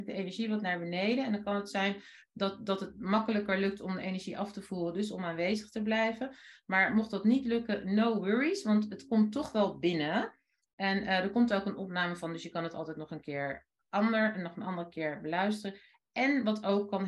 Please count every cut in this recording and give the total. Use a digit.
0